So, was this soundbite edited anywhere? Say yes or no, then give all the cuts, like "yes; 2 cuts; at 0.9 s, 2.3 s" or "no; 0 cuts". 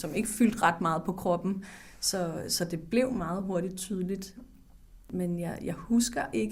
no; 0 cuts